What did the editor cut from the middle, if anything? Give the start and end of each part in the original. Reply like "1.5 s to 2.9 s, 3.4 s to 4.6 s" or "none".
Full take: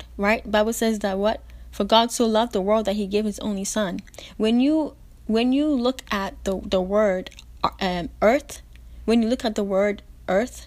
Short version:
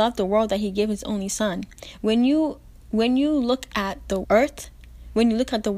6.6 s to 8.2 s